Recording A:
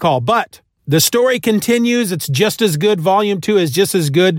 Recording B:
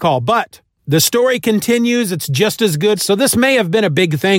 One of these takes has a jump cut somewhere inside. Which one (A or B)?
B